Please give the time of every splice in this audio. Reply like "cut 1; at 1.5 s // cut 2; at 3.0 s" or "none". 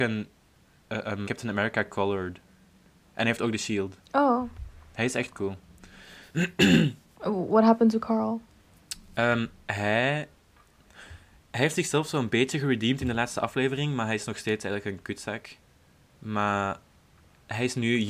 cut 1; at 1.2 s